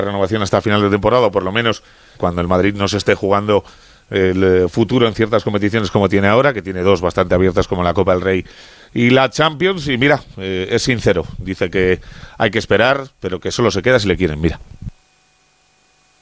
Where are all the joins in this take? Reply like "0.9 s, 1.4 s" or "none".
2.2 s